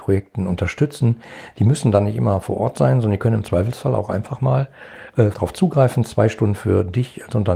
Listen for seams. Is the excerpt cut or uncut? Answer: cut